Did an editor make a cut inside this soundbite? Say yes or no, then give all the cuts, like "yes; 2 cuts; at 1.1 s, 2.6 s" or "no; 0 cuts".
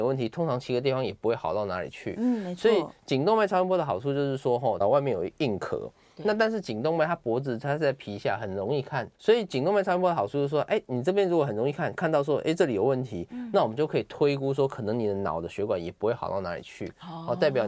yes; 2 cuts; at 4.8 s, 9.1 s